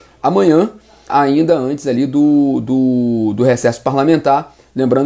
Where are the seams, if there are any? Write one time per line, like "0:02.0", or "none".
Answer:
0:01.1